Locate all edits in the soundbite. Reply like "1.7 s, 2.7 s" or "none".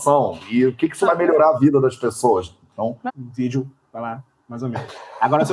3.1 s, 4.4 s